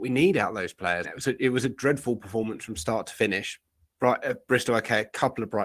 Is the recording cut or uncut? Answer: cut